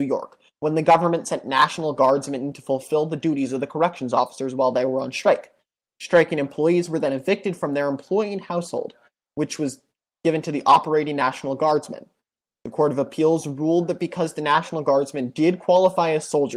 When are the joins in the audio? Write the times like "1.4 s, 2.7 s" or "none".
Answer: 12.5 s

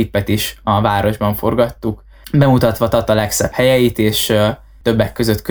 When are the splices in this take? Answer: none

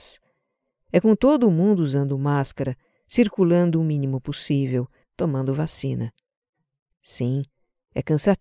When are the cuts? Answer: 5.0 s

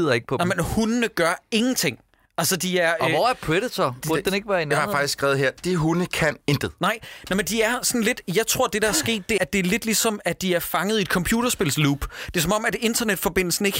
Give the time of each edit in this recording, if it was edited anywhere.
6.4 s, 9.4 s

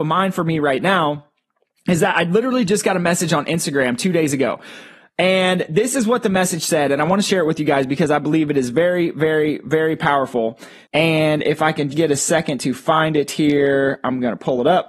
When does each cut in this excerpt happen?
10.8 s, 11.9 s

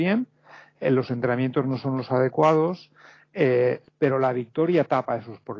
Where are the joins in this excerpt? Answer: 3.8 s

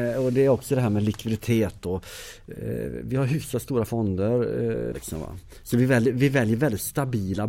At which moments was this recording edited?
4.9 s

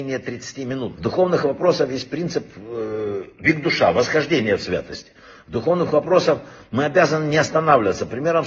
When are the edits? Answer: 0.9 s

